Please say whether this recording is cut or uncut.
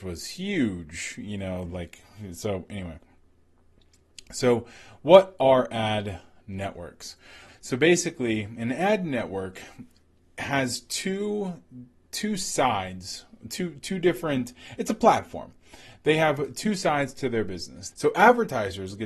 cut